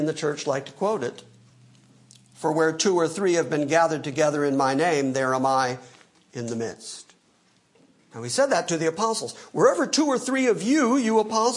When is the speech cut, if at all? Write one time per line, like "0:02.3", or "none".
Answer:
none

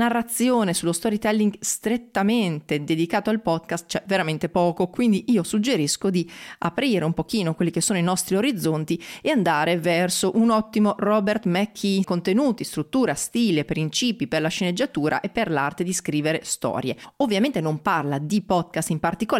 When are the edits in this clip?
0:12.0

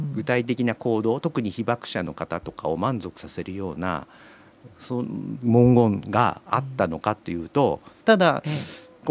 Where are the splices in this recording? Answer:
0:08.0

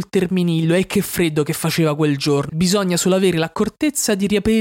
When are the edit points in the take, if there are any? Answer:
0:02.5

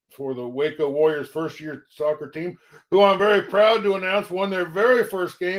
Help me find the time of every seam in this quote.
none

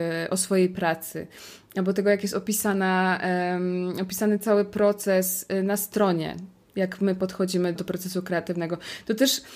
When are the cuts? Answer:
0:07.8

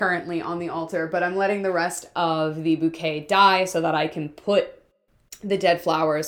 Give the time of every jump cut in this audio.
none

